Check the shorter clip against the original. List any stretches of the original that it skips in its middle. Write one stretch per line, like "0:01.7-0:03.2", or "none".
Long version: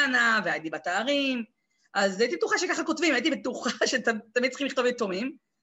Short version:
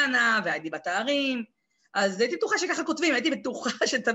none